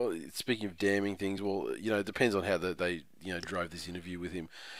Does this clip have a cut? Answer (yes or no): no